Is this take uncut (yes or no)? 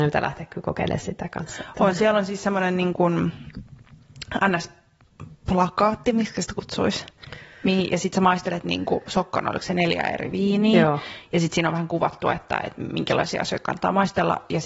yes